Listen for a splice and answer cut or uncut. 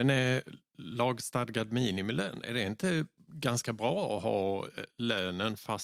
uncut